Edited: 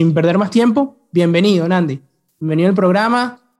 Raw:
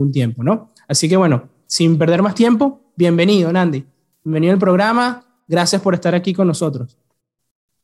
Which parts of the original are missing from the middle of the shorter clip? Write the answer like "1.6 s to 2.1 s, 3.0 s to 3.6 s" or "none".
none